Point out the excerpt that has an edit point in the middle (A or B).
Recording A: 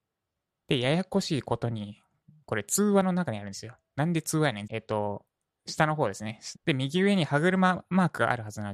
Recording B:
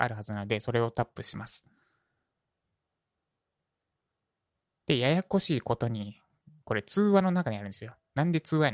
A